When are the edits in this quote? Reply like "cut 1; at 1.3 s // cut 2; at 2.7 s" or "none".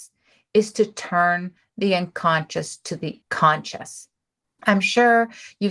cut 1; at 4.4 s